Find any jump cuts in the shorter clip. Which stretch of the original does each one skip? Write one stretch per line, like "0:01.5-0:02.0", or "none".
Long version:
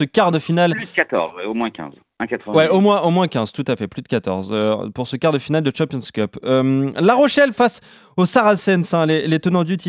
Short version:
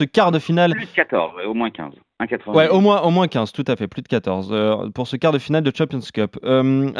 none

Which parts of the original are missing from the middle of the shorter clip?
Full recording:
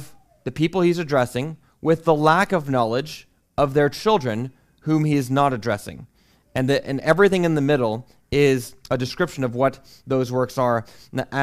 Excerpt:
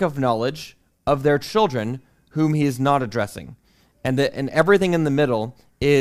none

